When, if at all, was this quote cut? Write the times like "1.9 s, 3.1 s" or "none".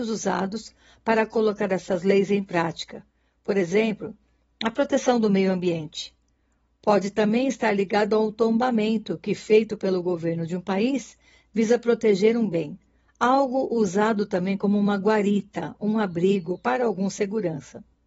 none